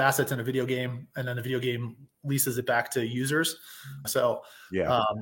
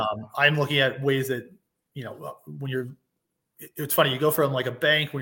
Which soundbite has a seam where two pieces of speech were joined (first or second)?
first